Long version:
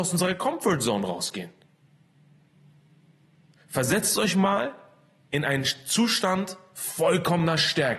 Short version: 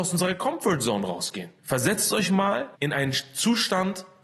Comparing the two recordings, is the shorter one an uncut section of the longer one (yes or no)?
no